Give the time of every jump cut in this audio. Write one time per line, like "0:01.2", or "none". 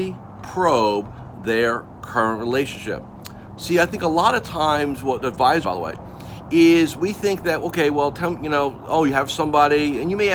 0:03.6
0:05.6